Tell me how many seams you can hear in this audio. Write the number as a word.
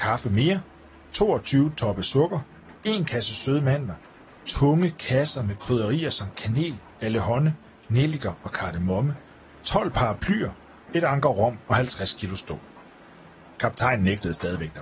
two